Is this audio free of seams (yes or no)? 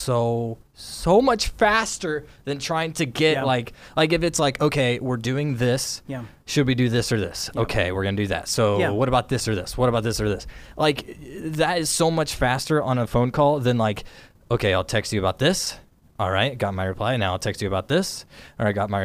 yes